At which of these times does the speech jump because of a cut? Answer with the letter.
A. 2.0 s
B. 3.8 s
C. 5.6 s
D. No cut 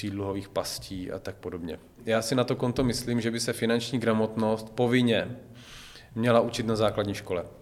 A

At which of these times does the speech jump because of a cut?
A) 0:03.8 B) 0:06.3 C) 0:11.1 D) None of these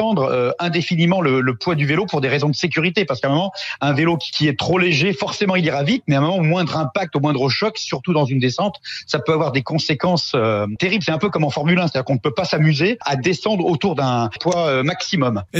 D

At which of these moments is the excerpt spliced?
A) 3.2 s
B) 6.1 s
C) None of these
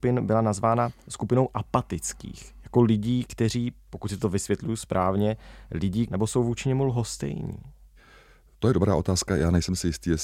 B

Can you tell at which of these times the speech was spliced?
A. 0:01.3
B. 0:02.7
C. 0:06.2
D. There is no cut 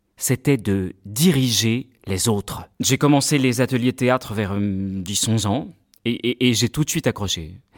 B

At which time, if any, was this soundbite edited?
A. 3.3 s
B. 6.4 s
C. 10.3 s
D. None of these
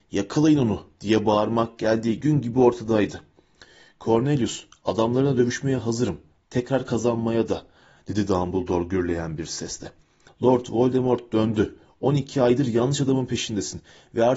C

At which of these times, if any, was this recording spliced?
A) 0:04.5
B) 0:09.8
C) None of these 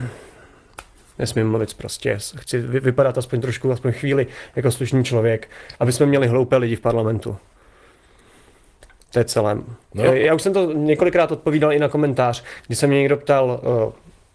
B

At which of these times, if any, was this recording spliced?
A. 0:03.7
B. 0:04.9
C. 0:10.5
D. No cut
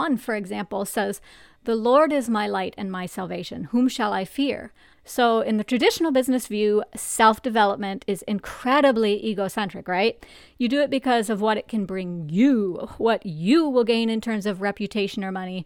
B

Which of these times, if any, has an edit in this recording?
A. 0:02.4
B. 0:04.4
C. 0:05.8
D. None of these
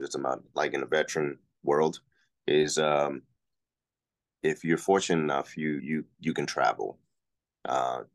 C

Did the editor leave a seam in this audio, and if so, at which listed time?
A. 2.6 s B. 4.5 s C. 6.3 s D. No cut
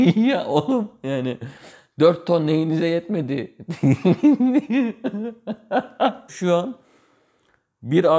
C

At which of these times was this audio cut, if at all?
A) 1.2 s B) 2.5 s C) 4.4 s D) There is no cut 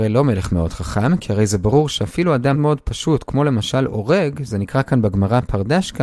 B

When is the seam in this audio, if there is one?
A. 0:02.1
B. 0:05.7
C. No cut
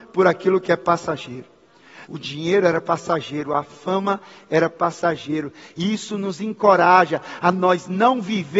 A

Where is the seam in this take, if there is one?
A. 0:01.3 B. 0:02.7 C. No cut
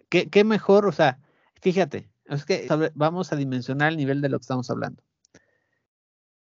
B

